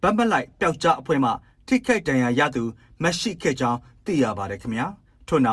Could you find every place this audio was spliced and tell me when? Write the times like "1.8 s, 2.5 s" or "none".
none